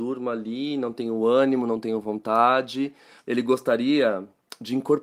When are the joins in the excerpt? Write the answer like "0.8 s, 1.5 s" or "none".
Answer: 3.2 s